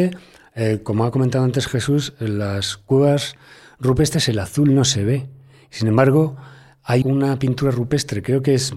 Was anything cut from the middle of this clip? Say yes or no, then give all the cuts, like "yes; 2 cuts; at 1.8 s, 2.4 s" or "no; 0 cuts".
yes; 1 cut; at 7.0 s